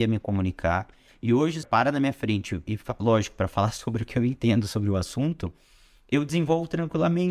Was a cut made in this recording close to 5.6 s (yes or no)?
no